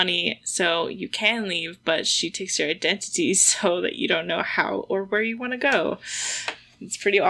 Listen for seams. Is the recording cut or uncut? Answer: uncut